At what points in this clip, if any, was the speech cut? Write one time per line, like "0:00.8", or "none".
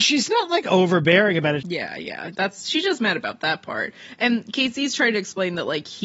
0:01.6